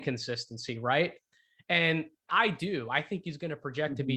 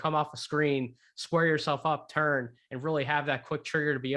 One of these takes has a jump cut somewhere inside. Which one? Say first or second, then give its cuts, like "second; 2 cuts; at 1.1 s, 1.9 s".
first; 1 cut; at 2.3 s